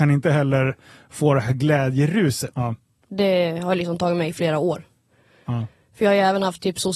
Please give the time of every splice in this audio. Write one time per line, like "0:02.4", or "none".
0:02.5